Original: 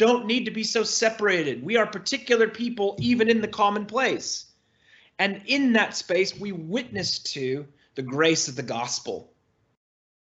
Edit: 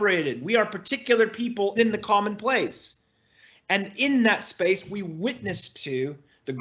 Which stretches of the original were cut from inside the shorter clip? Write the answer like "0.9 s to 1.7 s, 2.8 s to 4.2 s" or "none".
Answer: 3.0 s to 3.2 s